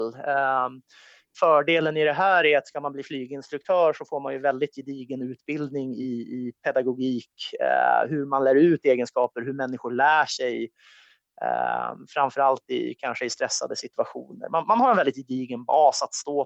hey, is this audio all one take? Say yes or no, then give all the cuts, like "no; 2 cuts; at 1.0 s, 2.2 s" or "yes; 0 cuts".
yes; 0 cuts